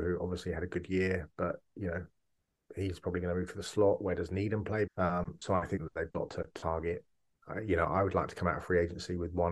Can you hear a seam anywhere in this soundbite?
yes; 1 cut; at 4.9 s

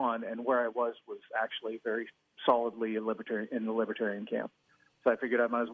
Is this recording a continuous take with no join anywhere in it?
yes; 0 cuts

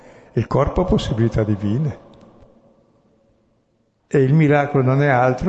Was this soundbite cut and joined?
yes; 1 cut; at 4.0 s

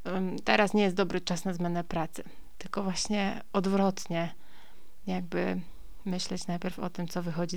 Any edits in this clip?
no; 0 cuts

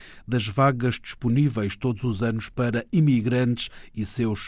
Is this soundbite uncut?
yes; 0 cuts

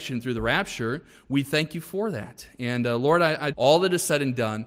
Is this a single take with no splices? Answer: no; 1 cut; at 3.5 s

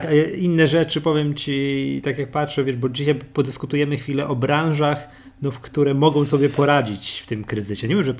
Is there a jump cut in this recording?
no; 0 cuts

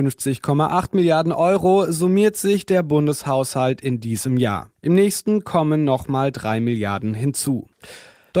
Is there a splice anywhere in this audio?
no; 0 cuts

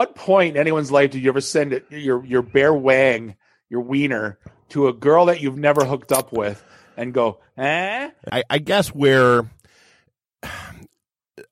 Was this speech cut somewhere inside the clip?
yes; 1 cut; at 8.3 s

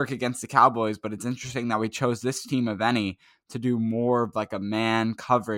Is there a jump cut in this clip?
no; 0 cuts

